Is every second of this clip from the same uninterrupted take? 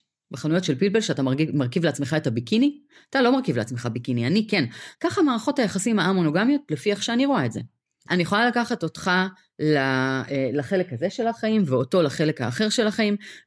no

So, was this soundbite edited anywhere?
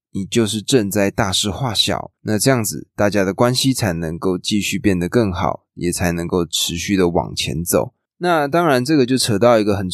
yes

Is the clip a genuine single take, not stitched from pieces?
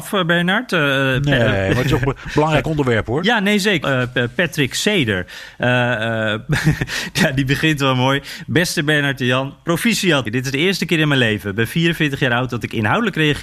no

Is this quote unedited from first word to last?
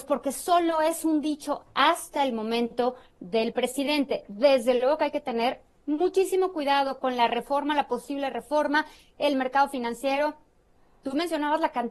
yes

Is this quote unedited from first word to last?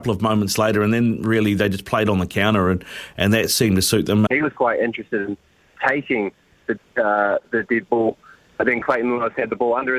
no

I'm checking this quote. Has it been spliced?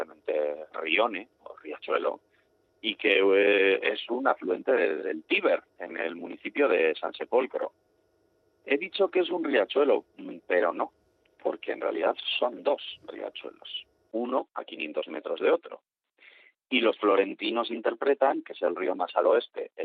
no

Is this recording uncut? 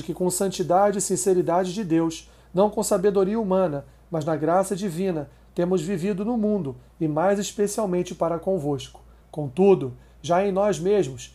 no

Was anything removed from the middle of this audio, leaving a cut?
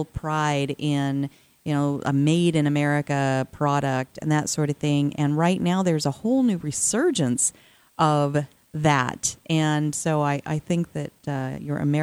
no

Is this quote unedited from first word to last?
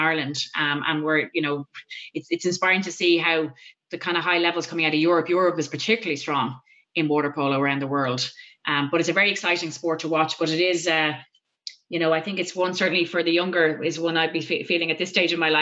yes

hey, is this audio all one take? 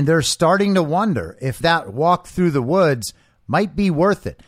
no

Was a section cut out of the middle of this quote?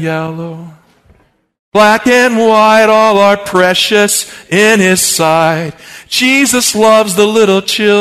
no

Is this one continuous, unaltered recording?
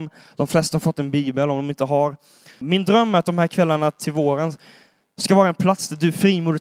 no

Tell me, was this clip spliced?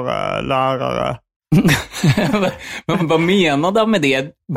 yes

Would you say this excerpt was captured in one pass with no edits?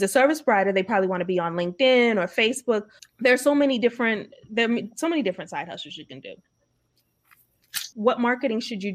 no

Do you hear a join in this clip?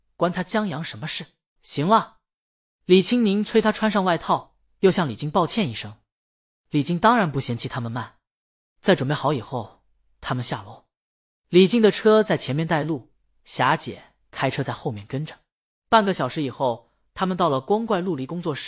yes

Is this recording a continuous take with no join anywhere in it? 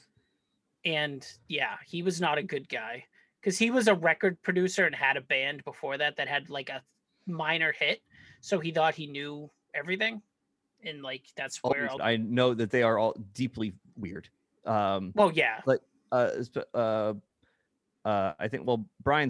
no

